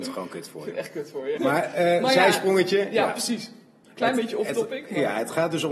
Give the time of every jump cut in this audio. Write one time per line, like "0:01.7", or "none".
0:01.4